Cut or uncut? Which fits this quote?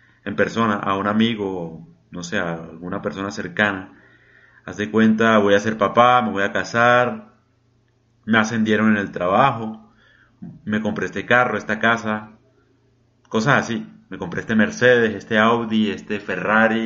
uncut